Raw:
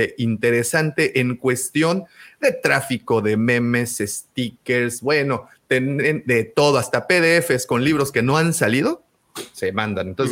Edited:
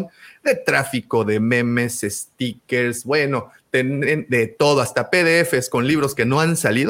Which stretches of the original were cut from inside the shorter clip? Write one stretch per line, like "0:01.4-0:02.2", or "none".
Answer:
none

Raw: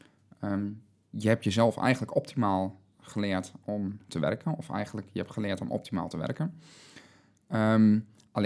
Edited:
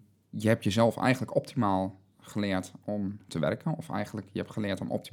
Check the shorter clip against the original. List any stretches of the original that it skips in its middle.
none

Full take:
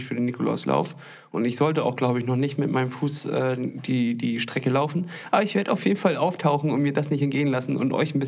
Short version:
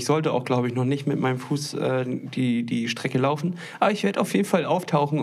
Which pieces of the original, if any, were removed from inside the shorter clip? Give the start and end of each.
none

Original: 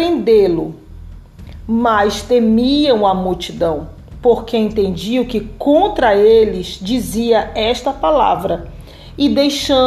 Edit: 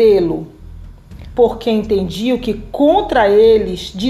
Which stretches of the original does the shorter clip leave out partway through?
0:01.6-0:04.2

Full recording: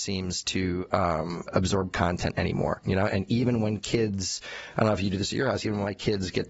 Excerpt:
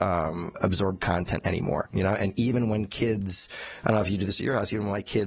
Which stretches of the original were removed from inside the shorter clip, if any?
none

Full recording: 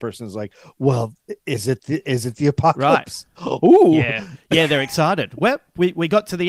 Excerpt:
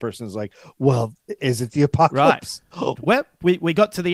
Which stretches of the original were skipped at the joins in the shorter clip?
0:01.4-0:02.0
0:03.6-0:05.3

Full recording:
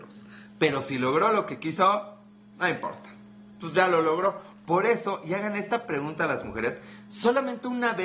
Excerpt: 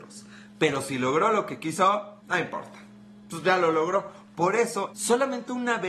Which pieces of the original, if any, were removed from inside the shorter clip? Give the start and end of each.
0:02.2-0:02.5
0:05.2-0:07.0

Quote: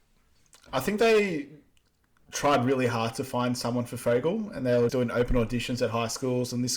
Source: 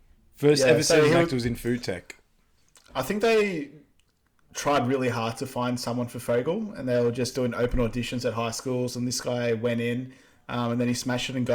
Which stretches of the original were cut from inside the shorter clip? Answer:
0:07.1-0:07.3

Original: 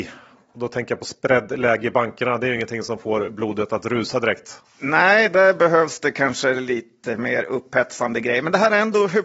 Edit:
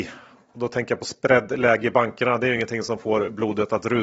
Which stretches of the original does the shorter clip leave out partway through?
none

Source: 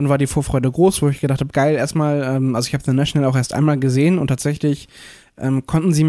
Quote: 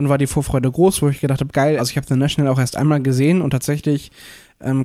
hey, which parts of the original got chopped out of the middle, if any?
0:01.8-0:02.5

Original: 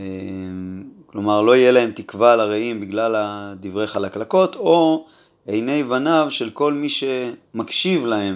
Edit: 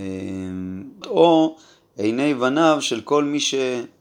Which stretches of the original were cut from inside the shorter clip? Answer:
0:01.0-0:04.5

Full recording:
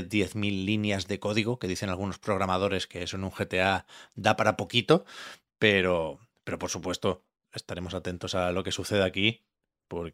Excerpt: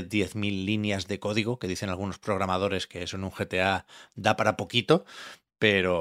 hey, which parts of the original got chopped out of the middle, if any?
none

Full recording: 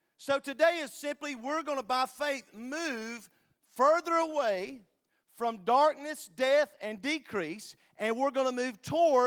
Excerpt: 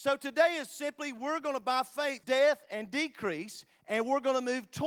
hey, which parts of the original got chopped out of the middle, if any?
0:02.5-0:06.3

